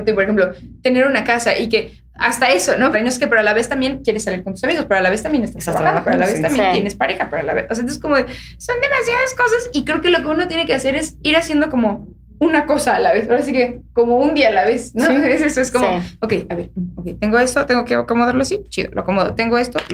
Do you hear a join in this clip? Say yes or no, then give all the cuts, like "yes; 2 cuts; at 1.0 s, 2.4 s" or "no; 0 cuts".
yes; 1 cut; at 2.9 s